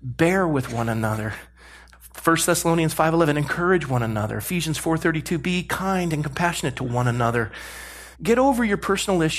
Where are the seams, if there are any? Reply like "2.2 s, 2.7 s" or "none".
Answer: 8.1 s